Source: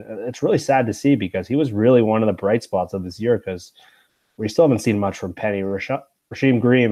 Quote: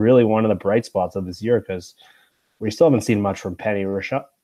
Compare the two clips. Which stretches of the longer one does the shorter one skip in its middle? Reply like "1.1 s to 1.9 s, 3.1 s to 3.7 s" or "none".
none